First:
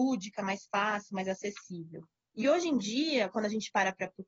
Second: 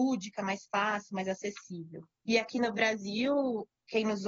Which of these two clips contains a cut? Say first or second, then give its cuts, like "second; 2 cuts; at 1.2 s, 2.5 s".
second; 1 cut; at 2.1 s